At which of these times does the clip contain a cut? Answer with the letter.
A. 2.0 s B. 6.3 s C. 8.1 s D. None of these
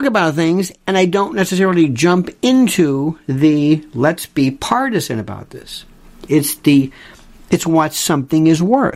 B